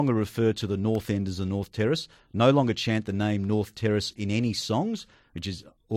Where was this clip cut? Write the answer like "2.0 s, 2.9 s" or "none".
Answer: none